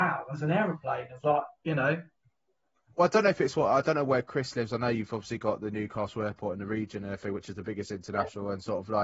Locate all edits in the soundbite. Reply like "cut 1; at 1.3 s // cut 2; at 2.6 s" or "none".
none